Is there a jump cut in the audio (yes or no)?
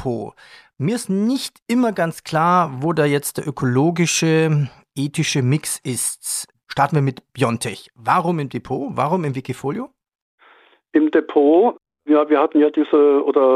no